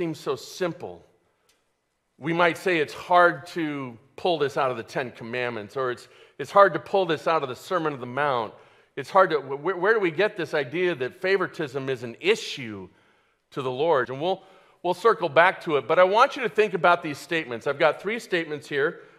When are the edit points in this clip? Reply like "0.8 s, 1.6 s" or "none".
14.1 s